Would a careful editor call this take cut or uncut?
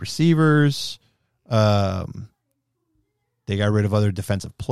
uncut